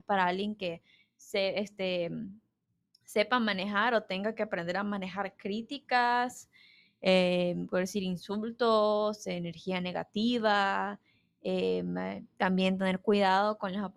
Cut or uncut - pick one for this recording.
uncut